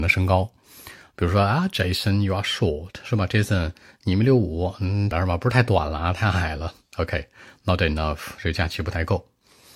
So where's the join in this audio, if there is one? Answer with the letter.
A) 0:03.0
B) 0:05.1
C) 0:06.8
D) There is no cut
B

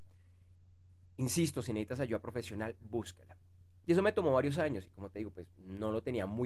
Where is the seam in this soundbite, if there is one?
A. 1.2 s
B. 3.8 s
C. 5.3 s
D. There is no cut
B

